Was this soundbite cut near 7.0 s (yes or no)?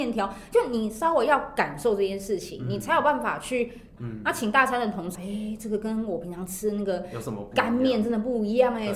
no